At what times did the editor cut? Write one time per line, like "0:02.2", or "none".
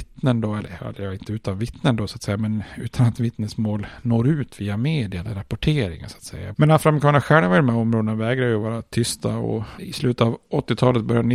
0:06.5
0:09.8